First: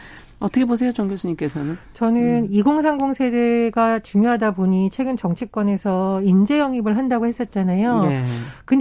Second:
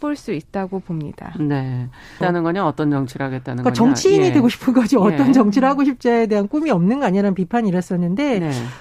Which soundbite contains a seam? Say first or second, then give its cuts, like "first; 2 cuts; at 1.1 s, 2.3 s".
second; 1 cut; at 2.2 s